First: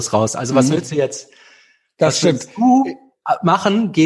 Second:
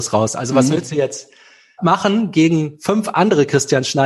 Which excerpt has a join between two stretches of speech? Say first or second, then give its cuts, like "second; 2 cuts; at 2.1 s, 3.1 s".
second; 1 cut; at 1.8 s